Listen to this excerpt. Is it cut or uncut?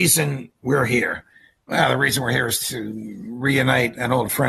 uncut